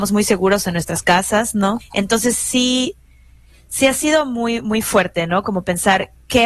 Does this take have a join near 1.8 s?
yes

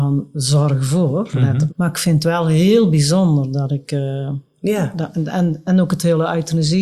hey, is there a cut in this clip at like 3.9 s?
no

